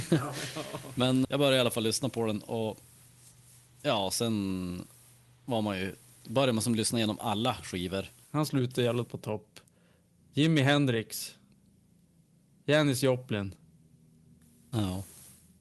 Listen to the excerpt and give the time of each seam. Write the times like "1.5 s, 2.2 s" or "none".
1.2 s, 8.2 s, 10.2 s